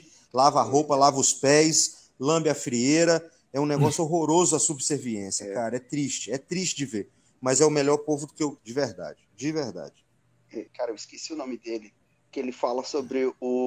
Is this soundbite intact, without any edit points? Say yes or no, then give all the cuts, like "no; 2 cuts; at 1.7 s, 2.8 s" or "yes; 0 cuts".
no; 2 cuts; at 8.6 s, 10.7 s